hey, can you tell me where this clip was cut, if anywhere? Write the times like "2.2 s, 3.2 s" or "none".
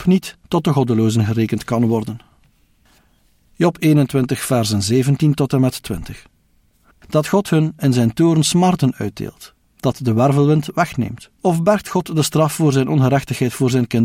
6.9 s, 9.7 s, 11.4 s